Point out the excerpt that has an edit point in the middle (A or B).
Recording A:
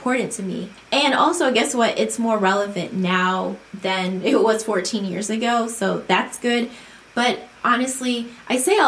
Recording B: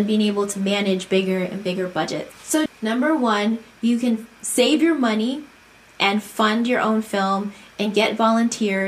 B